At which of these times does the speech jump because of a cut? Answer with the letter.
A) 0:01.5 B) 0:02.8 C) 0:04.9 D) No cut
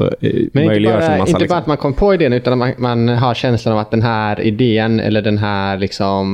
D